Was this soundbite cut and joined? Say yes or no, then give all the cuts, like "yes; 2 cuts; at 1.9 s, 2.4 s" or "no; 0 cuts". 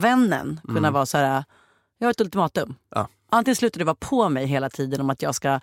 no; 0 cuts